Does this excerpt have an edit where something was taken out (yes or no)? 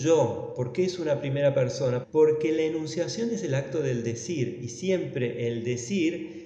yes